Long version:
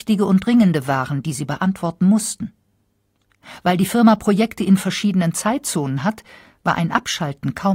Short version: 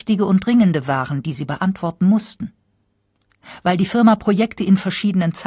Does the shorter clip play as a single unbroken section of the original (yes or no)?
yes